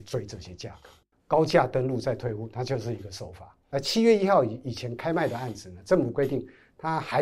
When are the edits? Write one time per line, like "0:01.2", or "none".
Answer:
0:01.1

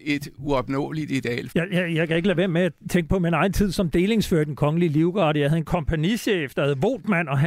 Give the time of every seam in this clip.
0:01.5

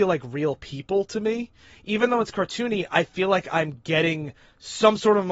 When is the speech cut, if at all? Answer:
none

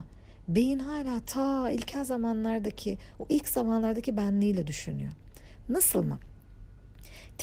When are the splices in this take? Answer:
none

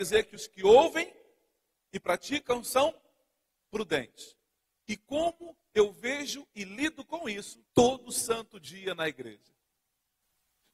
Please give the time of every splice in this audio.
0:04.8
0:07.7

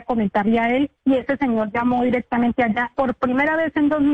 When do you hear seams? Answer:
0:01.0
0:02.9

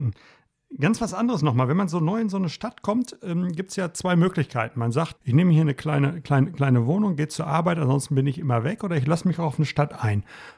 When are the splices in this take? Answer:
0:05.2

